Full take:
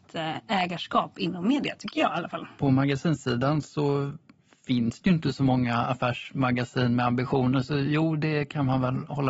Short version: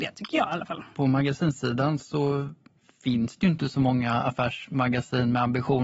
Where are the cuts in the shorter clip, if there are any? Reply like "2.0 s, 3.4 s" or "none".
none

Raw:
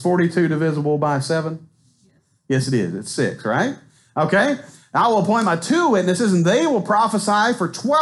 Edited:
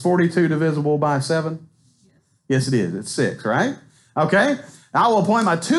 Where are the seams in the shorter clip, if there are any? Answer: none

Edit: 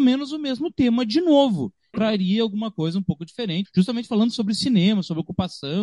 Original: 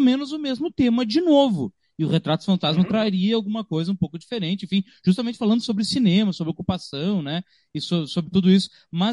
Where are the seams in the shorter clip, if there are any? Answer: 1.9 s, 3.6 s

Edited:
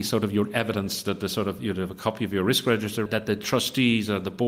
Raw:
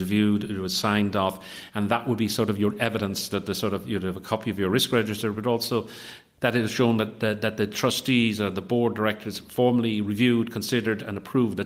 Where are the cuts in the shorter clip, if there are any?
3.1 s

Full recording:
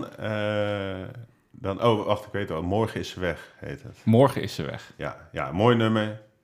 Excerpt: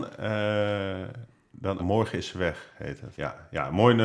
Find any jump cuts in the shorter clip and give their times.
1.8 s, 3.1 s

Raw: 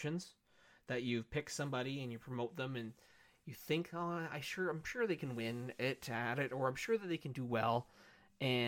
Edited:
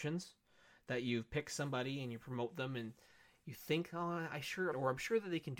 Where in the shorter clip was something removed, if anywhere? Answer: 4.7 s

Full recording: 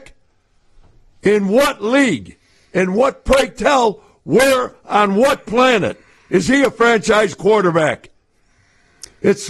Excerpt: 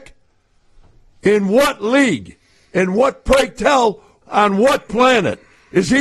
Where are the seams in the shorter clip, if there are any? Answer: 4.2 s

